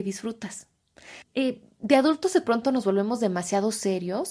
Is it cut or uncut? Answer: cut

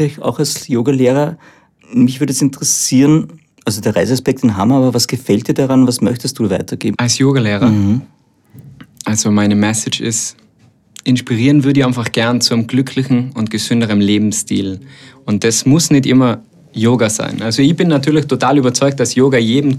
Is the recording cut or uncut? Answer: cut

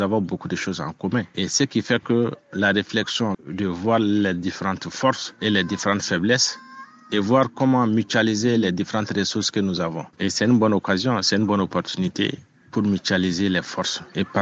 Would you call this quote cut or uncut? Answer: cut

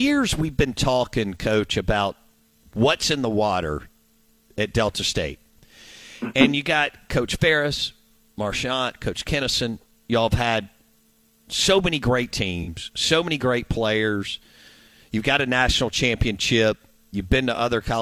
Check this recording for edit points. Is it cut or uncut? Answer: uncut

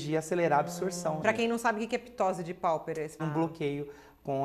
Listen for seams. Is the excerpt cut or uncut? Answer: cut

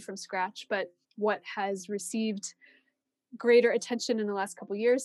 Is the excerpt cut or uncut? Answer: cut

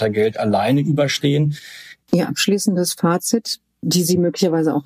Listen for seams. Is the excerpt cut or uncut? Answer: cut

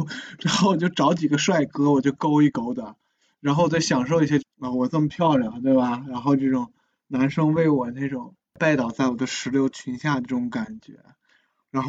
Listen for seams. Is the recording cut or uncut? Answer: cut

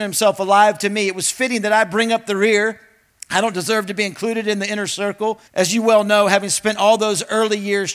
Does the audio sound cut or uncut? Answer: cut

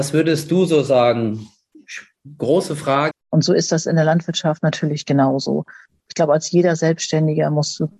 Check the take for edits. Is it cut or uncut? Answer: cut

